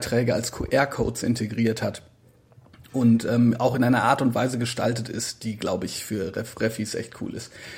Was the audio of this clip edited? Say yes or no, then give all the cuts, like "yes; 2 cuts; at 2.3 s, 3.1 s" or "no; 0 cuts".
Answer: no; 0 cuts